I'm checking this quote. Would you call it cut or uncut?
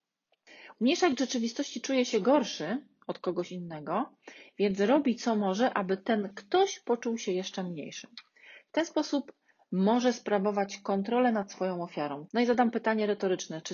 cut